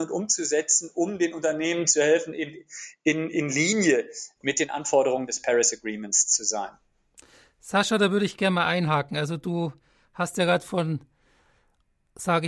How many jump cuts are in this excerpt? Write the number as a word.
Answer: zero